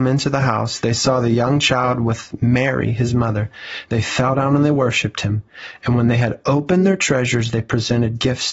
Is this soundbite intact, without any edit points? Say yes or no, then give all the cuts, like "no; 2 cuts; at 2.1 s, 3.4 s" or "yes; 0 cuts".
yes; 0 cuts